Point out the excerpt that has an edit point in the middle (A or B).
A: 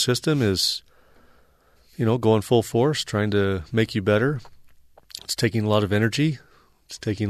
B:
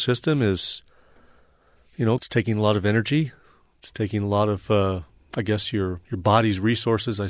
B